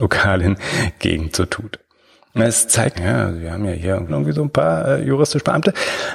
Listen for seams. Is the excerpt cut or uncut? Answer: cut